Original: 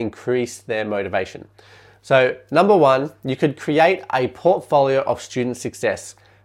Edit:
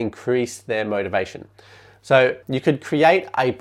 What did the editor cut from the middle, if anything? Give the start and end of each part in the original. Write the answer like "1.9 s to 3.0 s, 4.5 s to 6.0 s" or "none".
2.4 s to 3.2 s